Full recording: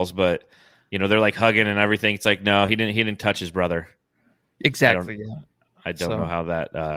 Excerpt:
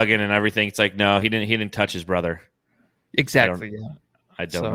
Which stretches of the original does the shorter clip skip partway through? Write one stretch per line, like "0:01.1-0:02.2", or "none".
none